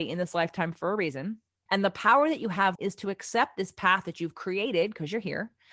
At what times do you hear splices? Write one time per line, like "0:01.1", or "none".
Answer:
0:01.7
0:02.7